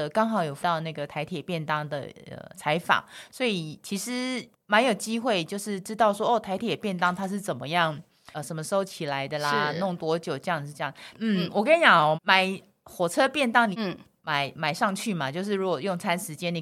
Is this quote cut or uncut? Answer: cut